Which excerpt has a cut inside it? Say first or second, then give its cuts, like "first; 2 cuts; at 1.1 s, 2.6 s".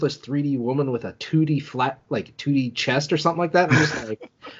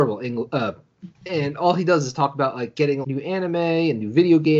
second; 2 cuts; at 1.1 s, 3.0 s